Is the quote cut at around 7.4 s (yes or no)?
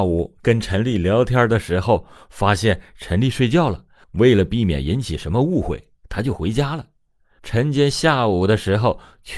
yes